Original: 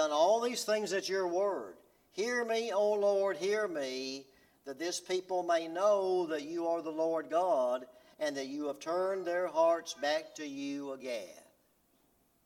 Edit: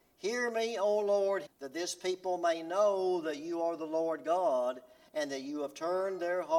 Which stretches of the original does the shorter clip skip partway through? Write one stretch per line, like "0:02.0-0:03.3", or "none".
0:03.4-0:04.5